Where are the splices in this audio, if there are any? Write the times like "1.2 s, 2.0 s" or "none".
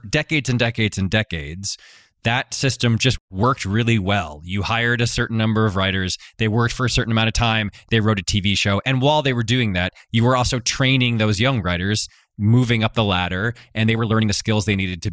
none